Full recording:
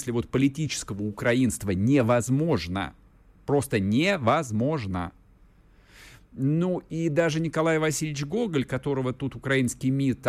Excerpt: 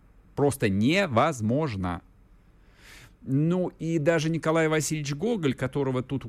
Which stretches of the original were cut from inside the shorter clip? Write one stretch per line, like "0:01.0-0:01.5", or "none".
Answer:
none